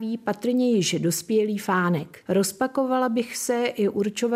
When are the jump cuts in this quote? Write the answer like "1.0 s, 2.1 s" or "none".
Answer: 2.2 s